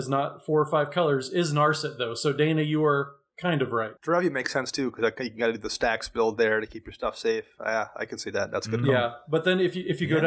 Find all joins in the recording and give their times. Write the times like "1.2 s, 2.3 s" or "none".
4.0 s